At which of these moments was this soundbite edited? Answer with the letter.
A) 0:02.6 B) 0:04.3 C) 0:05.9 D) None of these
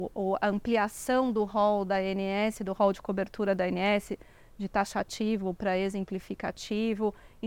D